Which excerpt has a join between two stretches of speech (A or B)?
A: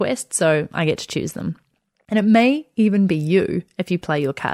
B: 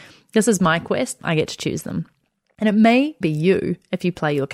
B